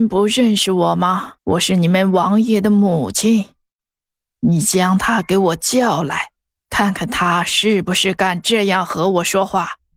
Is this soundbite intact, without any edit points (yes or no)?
no